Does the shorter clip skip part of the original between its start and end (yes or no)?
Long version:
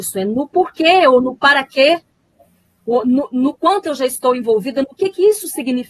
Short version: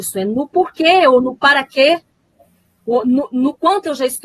no